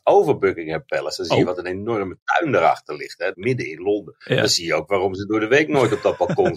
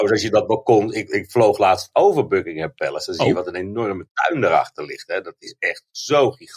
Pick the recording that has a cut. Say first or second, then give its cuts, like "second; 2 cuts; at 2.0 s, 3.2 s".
first; 1 cut; at 3.3 s